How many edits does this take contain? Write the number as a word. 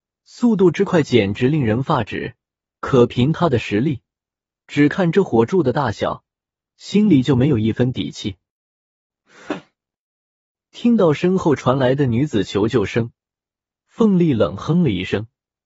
one